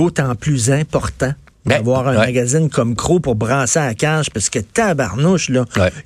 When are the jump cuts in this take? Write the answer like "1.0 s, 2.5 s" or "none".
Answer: none